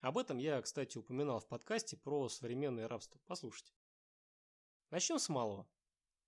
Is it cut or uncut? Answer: uncut